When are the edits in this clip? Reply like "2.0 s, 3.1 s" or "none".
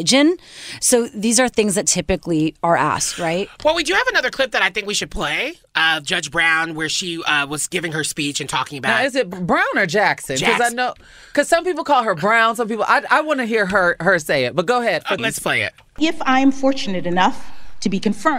15.2 s